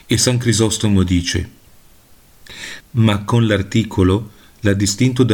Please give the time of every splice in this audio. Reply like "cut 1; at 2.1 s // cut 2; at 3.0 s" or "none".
cut 1; at 2.8 s